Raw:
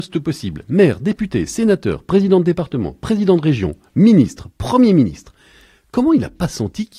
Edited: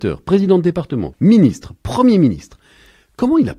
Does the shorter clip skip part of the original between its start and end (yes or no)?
yes